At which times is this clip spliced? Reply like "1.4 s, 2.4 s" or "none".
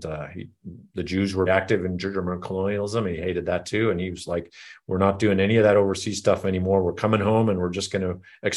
1.5 s